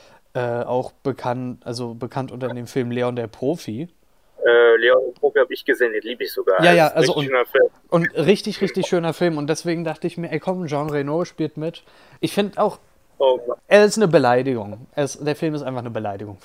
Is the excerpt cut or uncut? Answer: cut